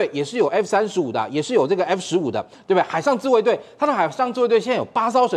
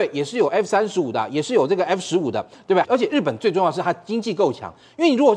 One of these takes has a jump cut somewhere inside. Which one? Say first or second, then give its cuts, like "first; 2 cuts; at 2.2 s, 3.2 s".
second; 1 cut; at 2.8 s